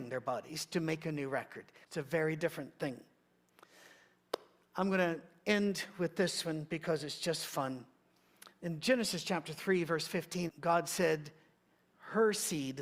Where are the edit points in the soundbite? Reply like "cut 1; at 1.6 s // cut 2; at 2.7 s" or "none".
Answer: cut 1; at 1.8 s // cut 2; at 10.5 s